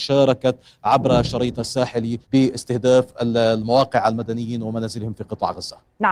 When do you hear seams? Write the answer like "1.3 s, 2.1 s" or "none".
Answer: 2.2 s